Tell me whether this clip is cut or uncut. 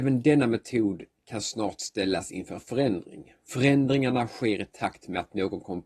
cut